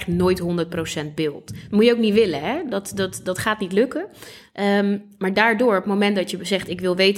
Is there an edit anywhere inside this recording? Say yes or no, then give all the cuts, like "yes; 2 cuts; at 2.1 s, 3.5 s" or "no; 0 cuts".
no; 0 cuts